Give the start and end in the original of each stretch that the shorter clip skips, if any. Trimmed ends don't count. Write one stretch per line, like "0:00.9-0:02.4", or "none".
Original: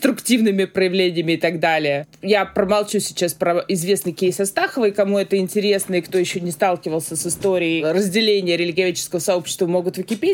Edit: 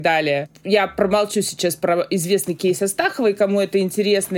none

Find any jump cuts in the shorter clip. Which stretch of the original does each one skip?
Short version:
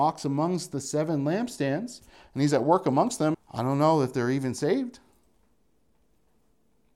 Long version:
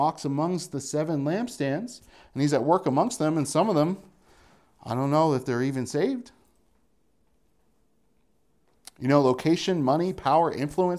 0:03.3-0:04.7

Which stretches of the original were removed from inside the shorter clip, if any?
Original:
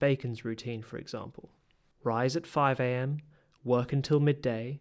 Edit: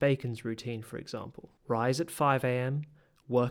0:01.6-0:01.9

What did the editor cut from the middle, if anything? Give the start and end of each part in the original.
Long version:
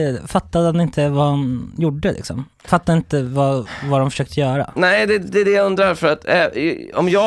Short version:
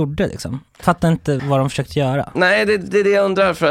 0:03.2-0:03.8

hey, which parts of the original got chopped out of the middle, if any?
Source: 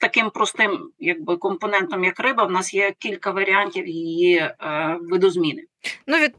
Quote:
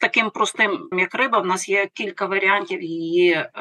0:00.9-0:02.0

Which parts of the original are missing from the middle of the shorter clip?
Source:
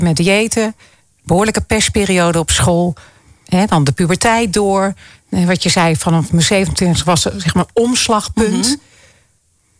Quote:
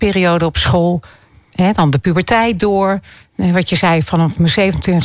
none

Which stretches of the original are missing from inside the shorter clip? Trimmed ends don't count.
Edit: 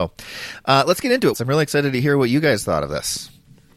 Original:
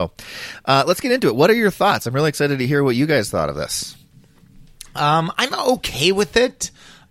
0:01.3-0:02.0

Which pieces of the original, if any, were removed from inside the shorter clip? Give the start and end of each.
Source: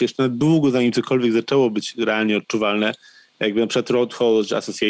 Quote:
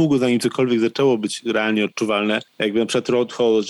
0:03.0-0:03.3

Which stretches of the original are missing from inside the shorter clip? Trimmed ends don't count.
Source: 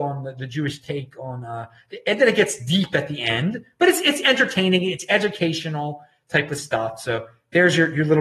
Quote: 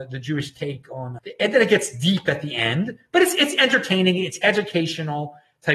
0:01.5-0:01.8

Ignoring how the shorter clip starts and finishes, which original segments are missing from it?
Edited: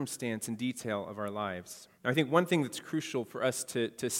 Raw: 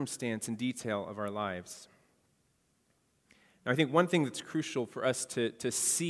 0:01.9-0:03.6

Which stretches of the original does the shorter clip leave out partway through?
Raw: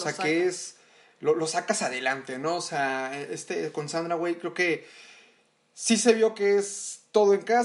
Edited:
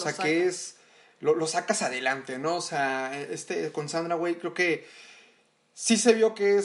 none

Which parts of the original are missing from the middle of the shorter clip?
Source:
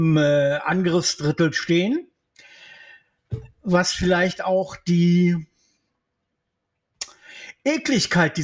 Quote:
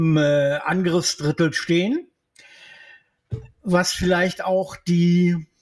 none

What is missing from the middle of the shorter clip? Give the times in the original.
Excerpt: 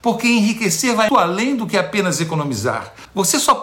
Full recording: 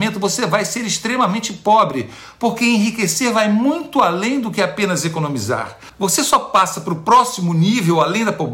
0:03.5-0:03.9

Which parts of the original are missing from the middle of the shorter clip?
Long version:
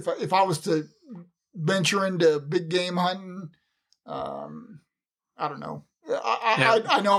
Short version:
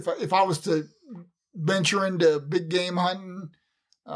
none

